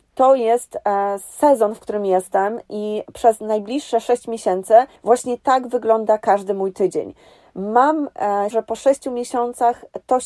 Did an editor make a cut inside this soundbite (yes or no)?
yes